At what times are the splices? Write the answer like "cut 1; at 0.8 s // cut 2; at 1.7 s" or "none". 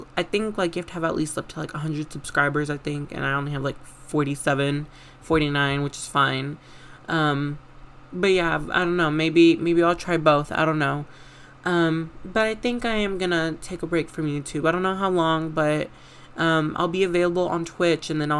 none